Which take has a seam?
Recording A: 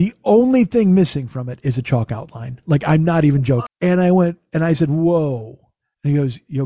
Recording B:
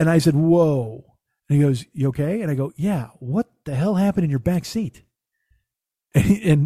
A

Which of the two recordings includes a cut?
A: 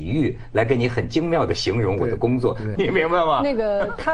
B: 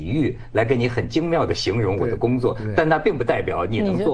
A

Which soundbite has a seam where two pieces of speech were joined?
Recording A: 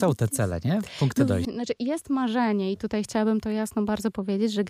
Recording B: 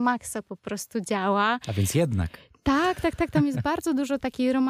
A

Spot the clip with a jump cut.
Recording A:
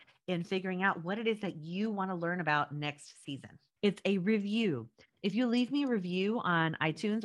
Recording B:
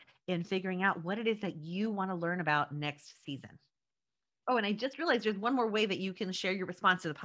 A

